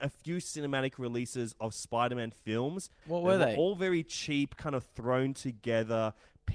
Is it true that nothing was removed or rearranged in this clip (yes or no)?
no